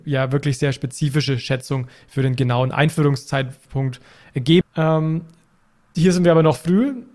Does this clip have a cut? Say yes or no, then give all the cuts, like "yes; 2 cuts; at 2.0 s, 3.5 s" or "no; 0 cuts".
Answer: yes; 1 cut; at 4.6 s